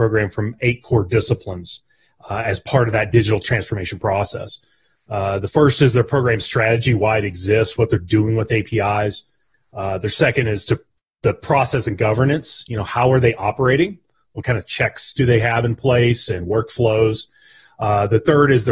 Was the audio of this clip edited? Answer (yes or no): no